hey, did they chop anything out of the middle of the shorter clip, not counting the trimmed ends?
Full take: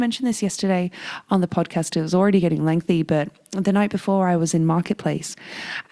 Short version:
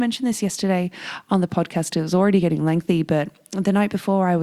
no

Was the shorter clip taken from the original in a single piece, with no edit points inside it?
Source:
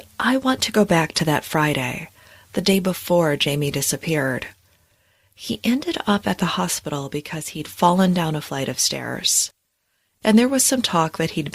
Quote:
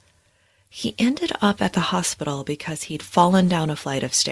yes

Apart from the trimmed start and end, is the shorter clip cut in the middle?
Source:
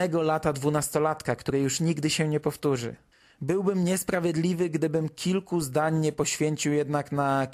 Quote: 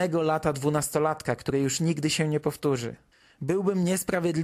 no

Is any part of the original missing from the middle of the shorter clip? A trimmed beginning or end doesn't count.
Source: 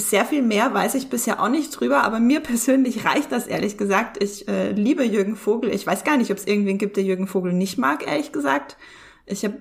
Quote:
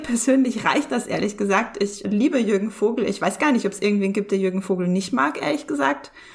yes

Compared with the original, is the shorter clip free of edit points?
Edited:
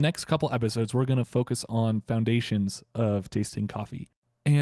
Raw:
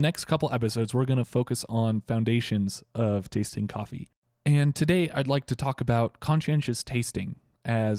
yes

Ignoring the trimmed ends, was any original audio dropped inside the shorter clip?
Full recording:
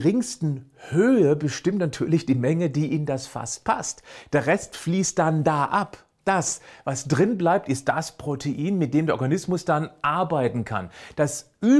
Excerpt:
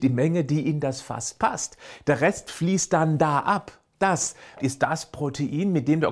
yes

